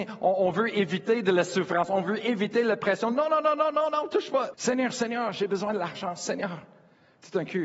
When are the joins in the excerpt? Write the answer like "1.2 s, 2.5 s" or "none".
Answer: 4.5 s